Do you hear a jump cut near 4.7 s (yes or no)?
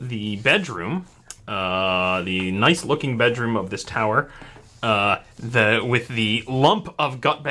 no